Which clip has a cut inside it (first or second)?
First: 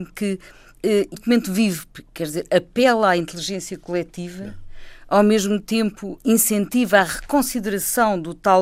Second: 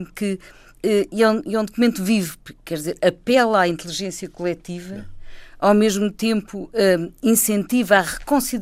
first